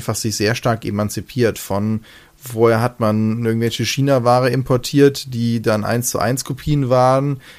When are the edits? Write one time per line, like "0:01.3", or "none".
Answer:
none

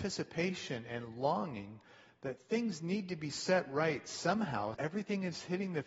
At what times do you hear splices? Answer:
0:04.7

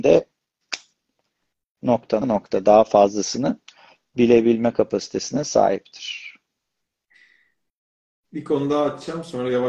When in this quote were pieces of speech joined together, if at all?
0:02.2

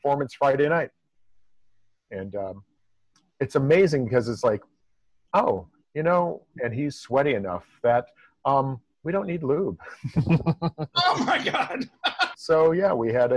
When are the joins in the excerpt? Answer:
0:06.5
0:12.3

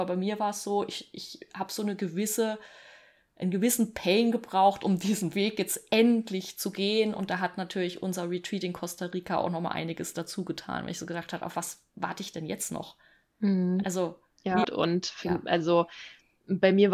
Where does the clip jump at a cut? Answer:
0:14.6

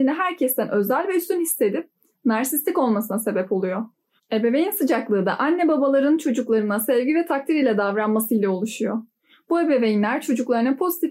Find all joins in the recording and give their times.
0:04.2

